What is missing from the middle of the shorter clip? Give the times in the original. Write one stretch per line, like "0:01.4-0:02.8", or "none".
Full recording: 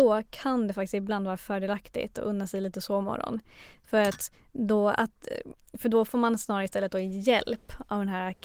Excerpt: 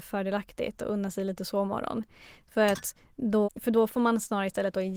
0:04.8-0:05.6